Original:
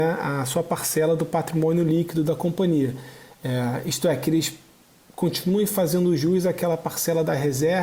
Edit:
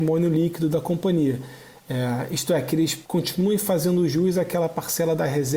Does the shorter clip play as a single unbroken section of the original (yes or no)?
no